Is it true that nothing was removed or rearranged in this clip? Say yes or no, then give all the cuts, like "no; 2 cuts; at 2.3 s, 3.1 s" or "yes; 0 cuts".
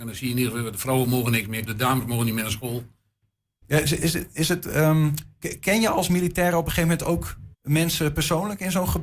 no; 3 cuts; at 1.7 s, 3.6 s, 7.5 s